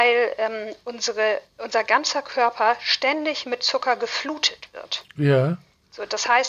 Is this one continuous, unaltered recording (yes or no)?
yes